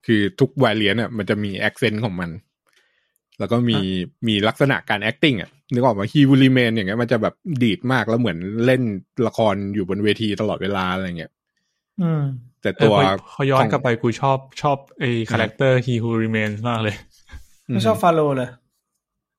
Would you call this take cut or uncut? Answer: cut